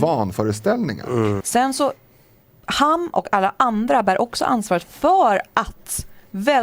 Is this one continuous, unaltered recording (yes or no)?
no